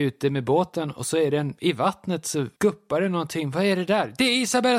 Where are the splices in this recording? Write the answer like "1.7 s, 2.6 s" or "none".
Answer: none